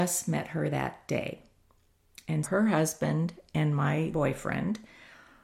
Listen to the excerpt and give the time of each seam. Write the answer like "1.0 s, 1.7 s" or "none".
2.4 s, 4.1 s